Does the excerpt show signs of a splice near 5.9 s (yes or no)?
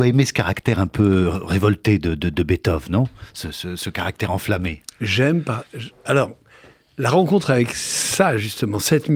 yes